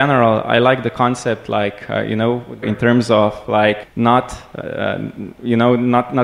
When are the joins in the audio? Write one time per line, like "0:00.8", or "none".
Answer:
0:02.6
0:03.8